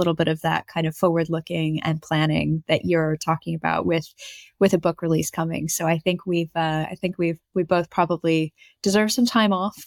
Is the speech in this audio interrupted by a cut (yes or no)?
no